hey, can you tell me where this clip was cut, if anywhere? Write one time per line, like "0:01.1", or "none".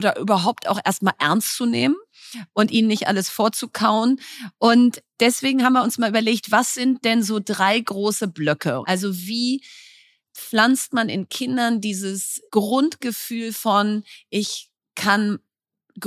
0:08.8
0:12.5